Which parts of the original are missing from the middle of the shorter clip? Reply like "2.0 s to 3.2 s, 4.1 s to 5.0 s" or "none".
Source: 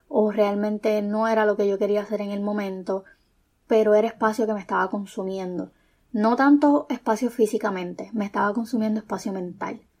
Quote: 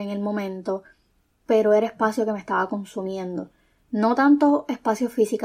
none